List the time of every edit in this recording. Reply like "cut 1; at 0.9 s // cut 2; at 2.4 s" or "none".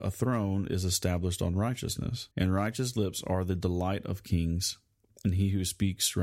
cut 1; at 2.3 s